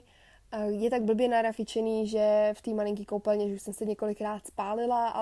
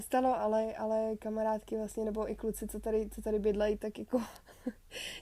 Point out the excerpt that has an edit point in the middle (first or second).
second